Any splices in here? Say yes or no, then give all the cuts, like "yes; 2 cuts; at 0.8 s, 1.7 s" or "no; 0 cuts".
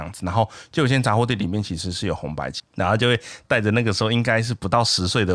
yes; 1 cut; at 2.6 s